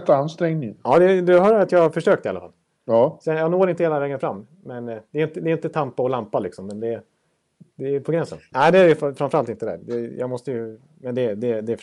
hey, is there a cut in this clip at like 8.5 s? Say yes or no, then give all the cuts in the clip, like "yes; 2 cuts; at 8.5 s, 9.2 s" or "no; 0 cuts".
yes; 1 cut; at 8.5 s